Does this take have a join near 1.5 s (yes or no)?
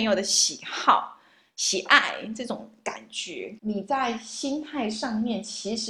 no